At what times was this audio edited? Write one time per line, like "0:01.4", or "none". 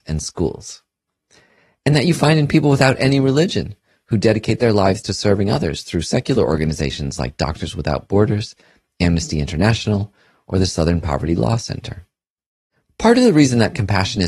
0:12.8